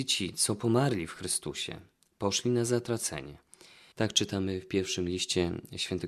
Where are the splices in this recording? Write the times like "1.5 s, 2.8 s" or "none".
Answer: 3.9 s